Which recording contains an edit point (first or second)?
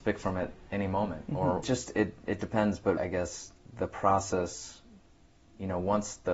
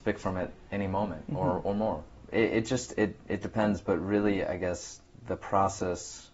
first